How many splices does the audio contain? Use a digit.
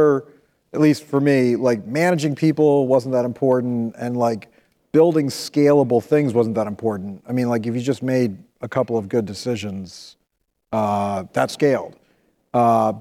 0